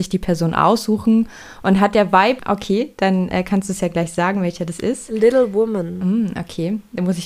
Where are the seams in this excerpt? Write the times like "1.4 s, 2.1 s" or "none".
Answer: 2.4 s